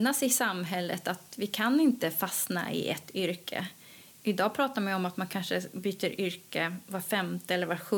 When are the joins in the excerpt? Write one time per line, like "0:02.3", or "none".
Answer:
none

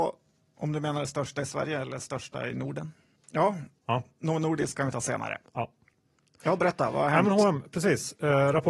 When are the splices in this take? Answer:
0:03.2

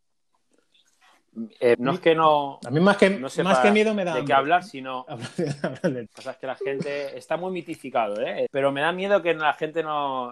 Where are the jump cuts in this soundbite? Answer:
0:01.7
0:06.1
0:08.5

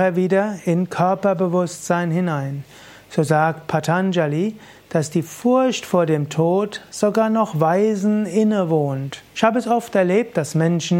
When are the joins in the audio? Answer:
0:09.3

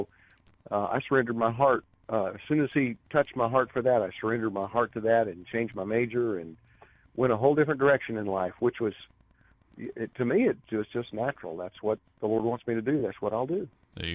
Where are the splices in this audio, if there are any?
none

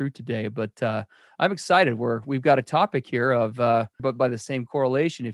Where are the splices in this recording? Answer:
0:04.0

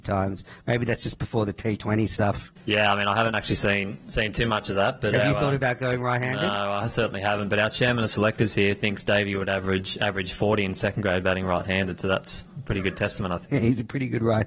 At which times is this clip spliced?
none

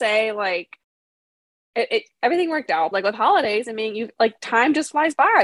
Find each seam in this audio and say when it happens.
0:02.9

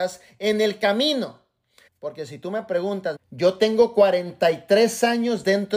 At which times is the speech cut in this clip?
0:01.9
0:03.2

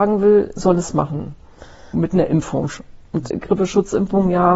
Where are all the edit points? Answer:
0:01.9
0:03.3

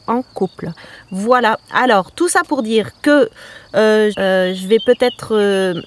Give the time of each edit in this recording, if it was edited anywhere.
0:04.1

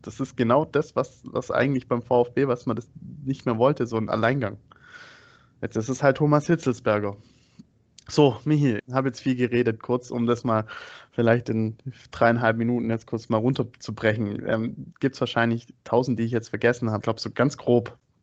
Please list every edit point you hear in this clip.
0:08.8
0:14.9
0:17.0

